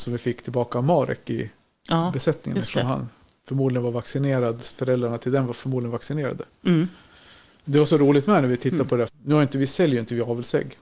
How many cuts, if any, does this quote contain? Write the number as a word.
two